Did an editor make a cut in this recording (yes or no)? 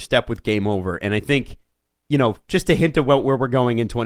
no